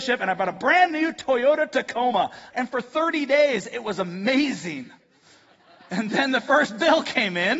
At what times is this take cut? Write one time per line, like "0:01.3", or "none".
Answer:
0:02.5